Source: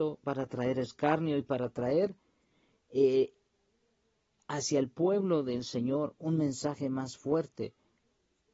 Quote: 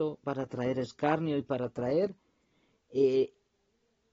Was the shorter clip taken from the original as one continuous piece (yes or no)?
yes